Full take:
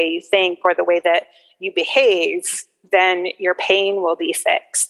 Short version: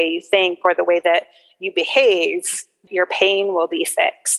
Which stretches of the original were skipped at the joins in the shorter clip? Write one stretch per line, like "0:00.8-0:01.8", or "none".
0:02.9-0:03.4